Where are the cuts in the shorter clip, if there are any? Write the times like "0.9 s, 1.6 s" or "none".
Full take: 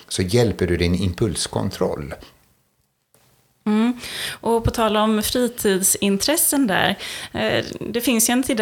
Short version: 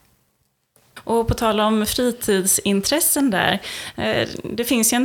1.0 s